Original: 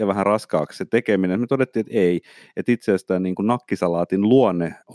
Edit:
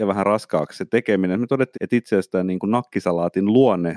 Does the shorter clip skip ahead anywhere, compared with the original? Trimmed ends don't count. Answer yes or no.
yes